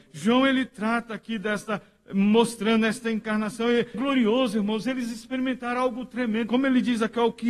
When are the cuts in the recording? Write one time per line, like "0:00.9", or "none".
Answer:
0:03.9
0:06.5